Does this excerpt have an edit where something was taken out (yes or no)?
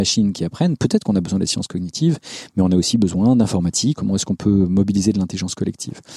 yes